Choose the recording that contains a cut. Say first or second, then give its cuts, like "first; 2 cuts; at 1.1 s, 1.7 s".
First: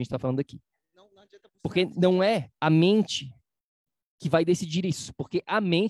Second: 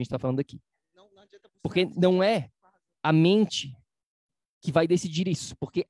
first; 1 cut; at 2.6 s